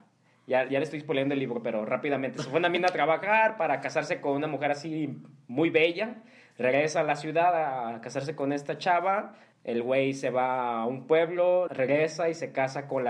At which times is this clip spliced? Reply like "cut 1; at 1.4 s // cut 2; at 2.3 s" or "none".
cut 1; at 9.5 s // cut 2; at 11.7 s